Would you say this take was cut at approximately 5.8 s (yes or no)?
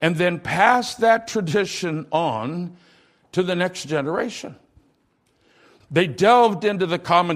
yes